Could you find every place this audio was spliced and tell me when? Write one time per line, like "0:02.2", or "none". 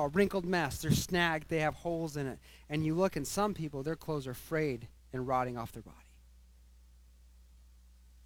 none